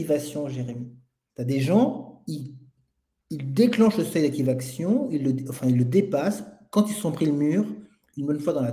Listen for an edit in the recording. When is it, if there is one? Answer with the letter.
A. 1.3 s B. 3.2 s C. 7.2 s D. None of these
A